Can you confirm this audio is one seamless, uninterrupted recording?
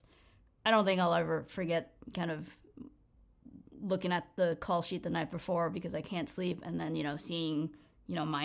yes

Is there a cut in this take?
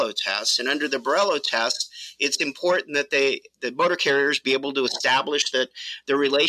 no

